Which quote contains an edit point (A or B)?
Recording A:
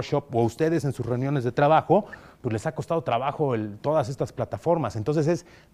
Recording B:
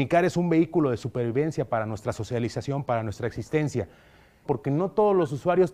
B